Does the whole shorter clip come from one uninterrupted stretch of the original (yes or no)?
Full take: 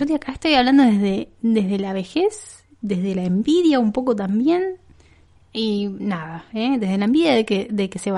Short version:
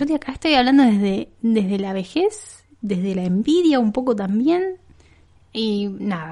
yes